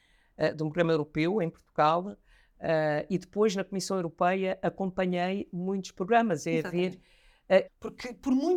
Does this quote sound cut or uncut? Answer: cut